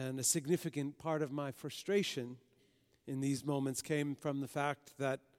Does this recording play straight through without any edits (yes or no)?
yes